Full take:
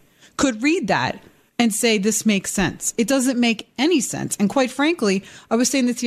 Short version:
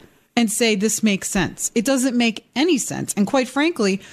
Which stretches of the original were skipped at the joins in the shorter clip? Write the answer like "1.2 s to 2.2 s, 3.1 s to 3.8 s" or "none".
none